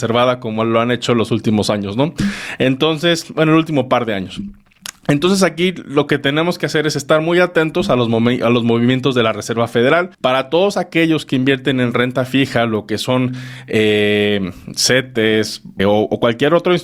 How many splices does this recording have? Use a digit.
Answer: 2